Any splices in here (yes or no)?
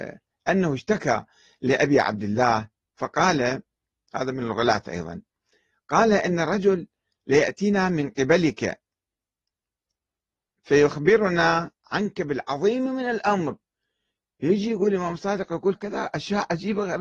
yes